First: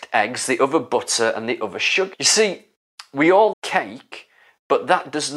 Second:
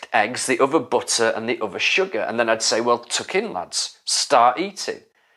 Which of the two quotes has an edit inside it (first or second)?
first